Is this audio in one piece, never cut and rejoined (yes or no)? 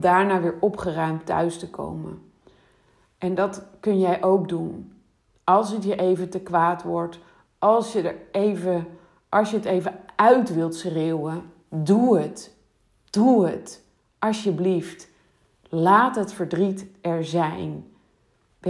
yes